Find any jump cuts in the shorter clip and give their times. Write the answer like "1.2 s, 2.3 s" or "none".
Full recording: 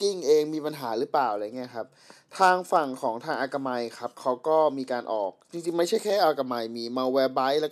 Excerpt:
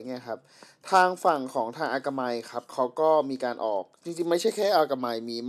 none